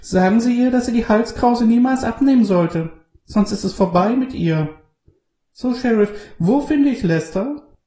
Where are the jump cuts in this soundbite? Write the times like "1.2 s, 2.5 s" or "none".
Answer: none